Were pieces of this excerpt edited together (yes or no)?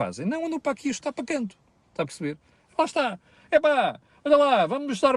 no